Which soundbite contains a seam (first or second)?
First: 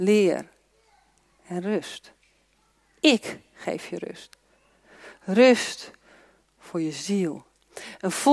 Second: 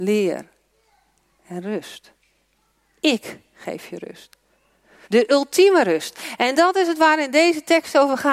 second